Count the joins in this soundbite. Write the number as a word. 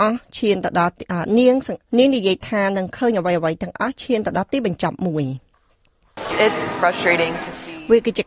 two